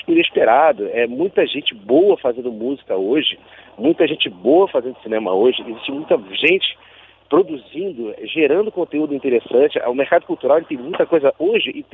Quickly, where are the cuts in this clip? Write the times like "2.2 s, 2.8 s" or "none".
none